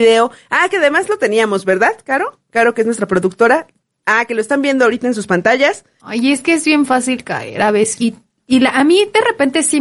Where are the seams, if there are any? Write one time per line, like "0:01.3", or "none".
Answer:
0:06.0
0:08.0